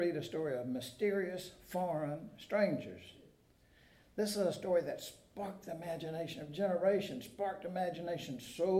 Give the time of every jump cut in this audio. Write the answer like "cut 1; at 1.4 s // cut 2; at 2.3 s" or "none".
none